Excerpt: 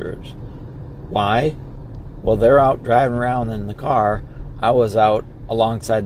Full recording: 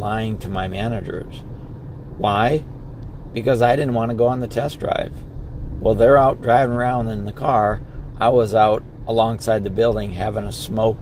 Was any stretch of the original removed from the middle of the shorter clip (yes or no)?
yes